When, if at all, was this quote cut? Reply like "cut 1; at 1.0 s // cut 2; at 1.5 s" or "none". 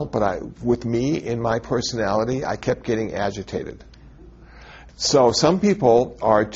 cut 1; at 4.9 s